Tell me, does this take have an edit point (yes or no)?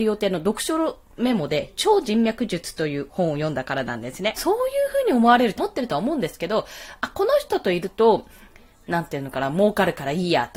yes